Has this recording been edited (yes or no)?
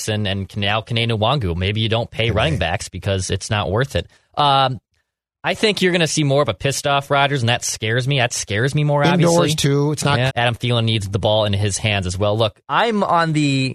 yes